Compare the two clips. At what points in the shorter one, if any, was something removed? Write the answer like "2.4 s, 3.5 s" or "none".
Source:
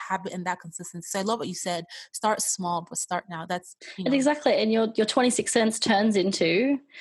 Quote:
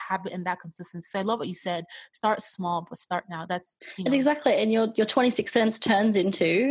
none